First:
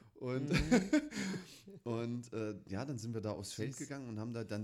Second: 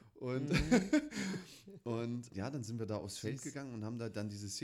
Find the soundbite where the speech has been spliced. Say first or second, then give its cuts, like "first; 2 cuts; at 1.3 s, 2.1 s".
second; 1 cut; at 2.3 s